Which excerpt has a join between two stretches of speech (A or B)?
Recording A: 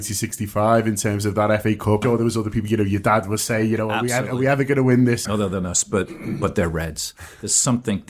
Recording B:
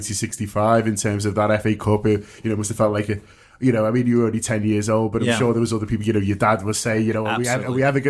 A